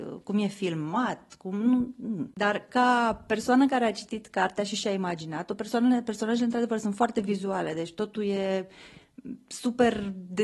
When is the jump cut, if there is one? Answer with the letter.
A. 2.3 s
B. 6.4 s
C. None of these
A